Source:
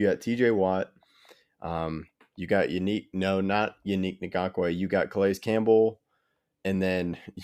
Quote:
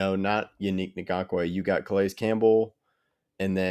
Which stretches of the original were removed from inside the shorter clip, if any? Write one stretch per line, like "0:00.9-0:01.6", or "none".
none